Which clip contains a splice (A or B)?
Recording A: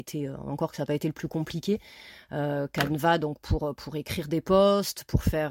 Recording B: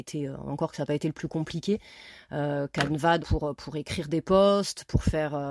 B